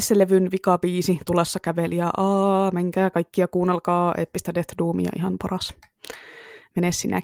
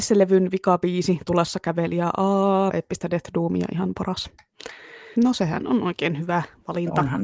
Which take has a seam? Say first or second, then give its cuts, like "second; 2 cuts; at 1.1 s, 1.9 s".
second; 2 cuts; at 2.7 s, 5.2 s